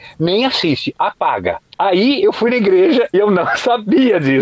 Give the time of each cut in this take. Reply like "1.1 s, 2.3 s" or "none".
1.7 s, 3.1 s